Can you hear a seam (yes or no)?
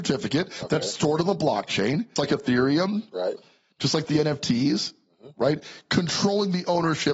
yes